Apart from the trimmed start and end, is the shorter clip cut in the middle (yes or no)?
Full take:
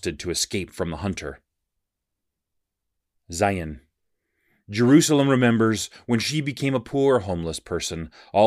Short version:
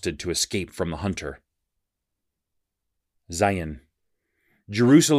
no